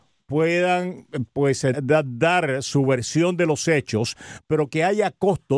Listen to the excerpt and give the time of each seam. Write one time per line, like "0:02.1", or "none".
0:01.7